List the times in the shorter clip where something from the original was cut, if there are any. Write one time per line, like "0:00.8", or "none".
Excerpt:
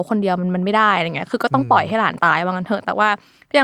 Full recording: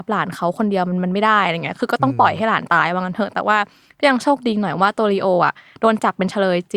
none